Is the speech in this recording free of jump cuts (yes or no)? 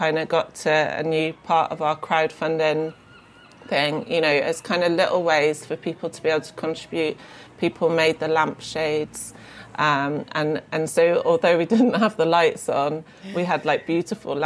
yes